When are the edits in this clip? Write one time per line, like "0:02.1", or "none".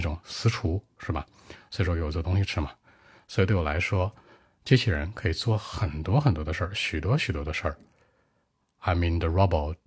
none